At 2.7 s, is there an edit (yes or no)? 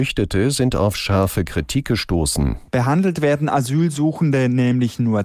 yes